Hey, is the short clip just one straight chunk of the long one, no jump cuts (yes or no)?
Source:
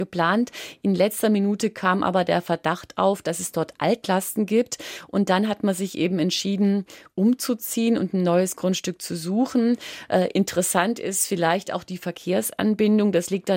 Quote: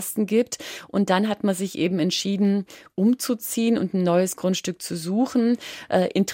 yes